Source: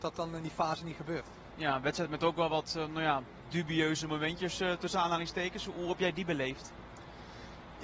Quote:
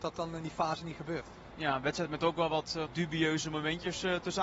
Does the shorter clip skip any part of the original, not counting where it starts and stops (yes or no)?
yes